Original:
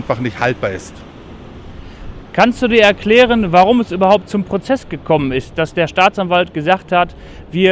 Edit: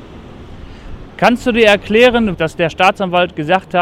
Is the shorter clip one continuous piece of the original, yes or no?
no